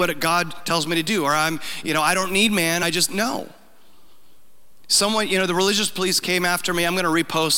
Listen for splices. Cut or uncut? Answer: uncut